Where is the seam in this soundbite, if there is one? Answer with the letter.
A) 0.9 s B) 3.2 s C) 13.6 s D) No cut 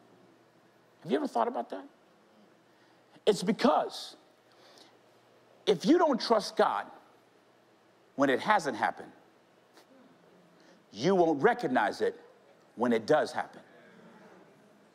D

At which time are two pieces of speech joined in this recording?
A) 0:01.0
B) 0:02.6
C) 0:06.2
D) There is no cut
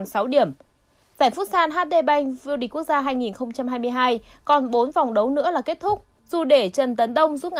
C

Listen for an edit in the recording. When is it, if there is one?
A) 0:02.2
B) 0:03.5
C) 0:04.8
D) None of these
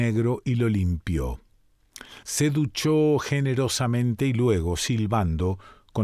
A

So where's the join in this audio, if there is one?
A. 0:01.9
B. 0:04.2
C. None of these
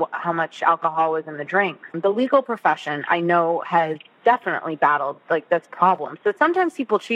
A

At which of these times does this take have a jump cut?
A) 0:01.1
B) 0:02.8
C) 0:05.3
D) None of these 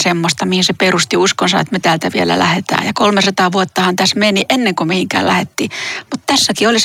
D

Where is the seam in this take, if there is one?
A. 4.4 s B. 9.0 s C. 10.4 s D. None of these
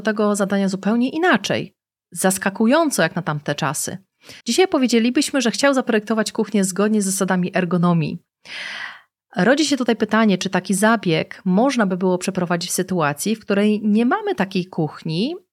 A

